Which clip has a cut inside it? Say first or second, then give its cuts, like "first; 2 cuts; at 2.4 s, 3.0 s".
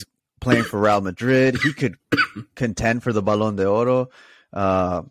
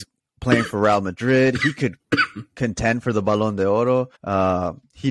second; 1 cut; at 4.1 s